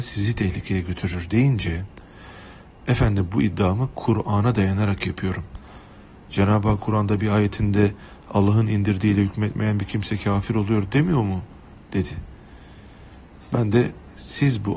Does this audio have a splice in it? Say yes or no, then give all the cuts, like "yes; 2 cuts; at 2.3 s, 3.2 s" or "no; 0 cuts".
no; 0 cuts